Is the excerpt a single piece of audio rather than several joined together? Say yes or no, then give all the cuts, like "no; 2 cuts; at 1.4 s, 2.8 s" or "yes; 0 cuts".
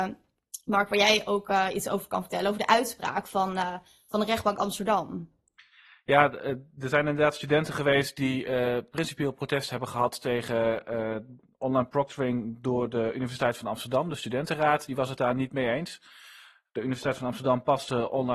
yes; 0 cuts